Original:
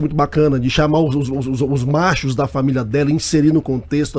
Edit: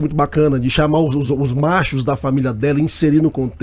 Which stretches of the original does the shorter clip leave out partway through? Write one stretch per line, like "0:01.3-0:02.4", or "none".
0:01.3-0:01.6